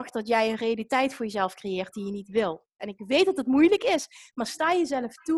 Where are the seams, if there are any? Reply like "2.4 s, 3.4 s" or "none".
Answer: 2.8 s